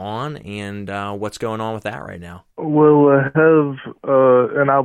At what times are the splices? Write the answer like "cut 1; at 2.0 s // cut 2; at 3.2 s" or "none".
cut 1; at 2.5 s